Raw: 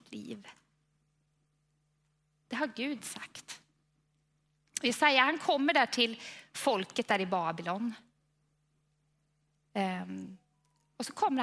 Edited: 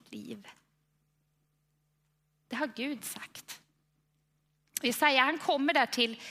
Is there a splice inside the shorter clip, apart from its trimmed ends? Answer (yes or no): no